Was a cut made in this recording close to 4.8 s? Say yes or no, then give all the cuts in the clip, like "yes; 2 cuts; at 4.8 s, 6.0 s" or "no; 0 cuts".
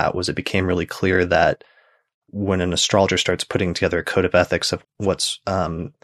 yes; 1 cut; at 4.8 s